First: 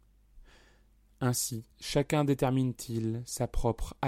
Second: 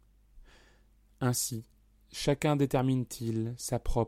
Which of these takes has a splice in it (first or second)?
first